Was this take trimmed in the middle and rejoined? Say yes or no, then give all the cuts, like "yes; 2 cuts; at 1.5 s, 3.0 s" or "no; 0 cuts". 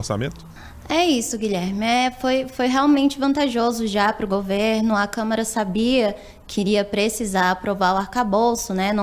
no; 0 cuts